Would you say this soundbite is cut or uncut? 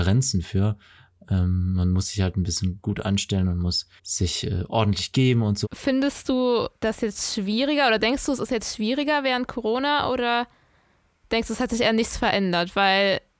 cut